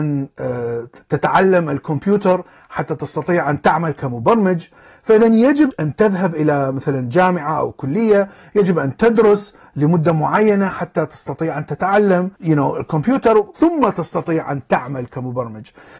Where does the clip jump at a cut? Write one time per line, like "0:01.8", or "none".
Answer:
0:05.7
0:12.3
0:13.5

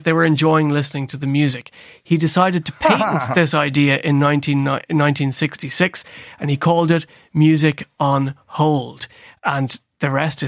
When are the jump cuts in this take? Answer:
none

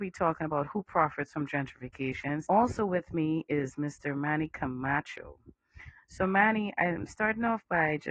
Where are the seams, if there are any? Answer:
0:02.4

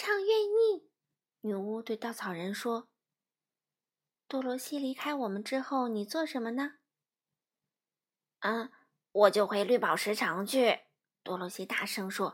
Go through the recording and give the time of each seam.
0:01.3
0:11.0

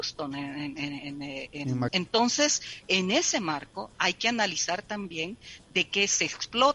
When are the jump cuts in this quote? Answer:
0:01.9
0:03.9

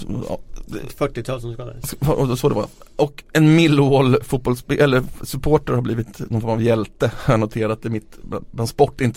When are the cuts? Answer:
none

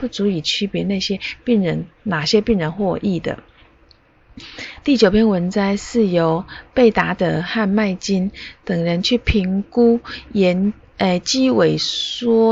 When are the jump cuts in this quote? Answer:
none

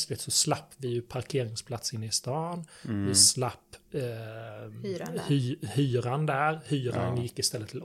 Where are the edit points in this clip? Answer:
none

